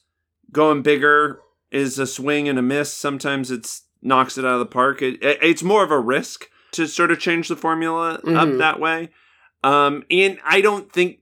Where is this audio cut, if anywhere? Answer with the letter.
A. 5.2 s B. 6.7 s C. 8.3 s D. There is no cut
B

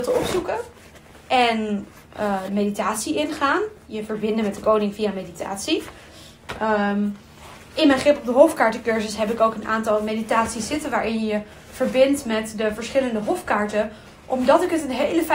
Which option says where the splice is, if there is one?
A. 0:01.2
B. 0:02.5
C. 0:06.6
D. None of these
B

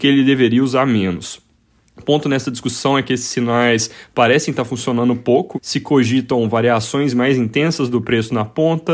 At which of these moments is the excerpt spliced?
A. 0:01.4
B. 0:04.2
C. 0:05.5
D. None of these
C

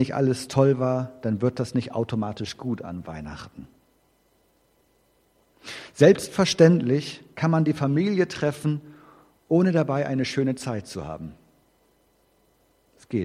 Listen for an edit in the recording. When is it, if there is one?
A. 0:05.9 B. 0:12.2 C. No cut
C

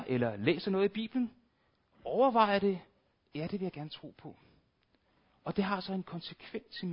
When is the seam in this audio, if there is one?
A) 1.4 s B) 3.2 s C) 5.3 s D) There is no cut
B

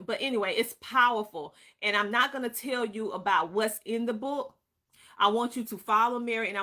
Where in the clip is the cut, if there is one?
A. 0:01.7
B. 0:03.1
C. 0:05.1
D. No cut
D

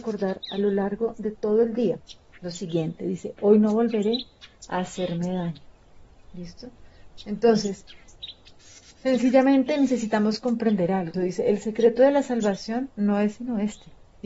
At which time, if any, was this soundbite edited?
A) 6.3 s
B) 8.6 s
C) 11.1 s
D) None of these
C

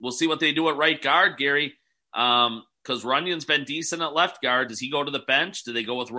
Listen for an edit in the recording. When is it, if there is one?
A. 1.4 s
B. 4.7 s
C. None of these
C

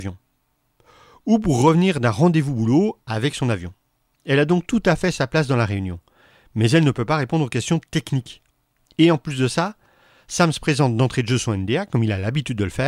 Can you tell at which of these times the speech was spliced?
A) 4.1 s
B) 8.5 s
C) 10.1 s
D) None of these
A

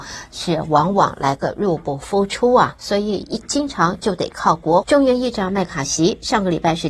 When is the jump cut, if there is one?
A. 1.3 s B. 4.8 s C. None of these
B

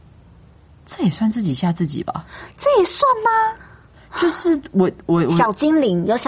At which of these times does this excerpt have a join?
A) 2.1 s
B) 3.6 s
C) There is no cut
B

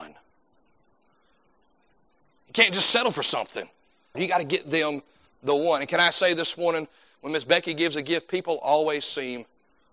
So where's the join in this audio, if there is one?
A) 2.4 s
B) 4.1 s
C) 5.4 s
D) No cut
B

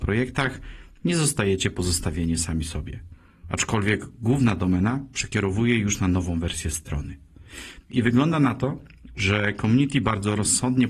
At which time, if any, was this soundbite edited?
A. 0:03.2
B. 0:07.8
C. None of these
B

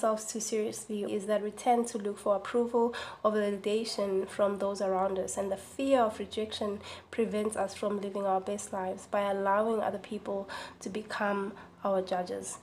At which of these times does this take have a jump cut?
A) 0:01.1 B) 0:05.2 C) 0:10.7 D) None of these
A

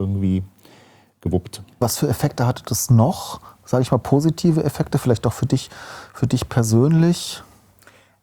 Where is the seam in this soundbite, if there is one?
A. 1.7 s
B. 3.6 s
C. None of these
C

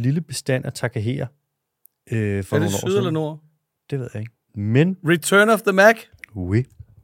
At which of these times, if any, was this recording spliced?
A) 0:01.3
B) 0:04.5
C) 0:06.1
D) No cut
B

